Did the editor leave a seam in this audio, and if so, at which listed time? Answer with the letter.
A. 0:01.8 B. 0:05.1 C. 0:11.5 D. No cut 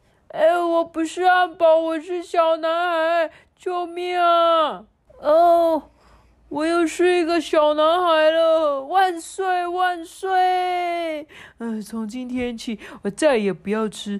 B